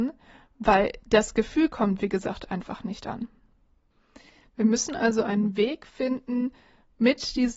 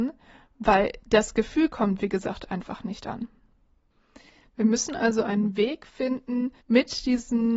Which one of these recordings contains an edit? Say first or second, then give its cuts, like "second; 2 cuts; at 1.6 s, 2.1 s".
second; 1 cut; at 6.6 s